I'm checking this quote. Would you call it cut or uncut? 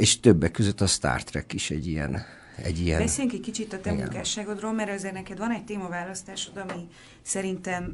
uncut